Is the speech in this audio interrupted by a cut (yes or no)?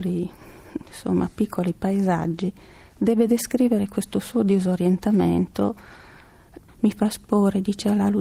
yes